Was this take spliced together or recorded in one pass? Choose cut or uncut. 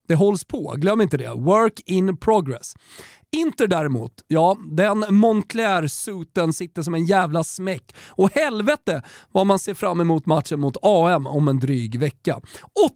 uncut